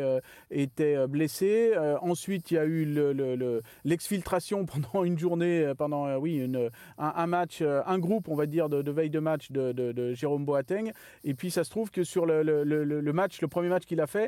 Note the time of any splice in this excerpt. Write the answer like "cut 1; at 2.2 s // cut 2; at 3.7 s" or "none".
none

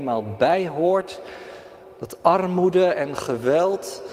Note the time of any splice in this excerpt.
none

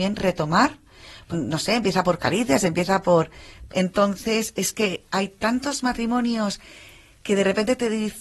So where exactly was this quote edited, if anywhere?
cut 1; at 1.3 s // cut 2; at 3.7 s // cut 3; at 5.1 s

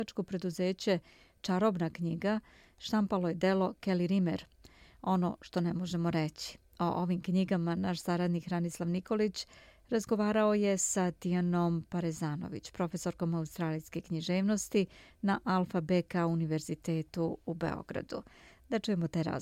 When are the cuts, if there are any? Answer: none

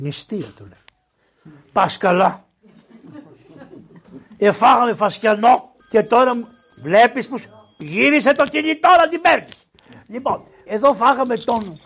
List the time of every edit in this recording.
cut 1; at 5.8 s // cut 2; at 10.7 s

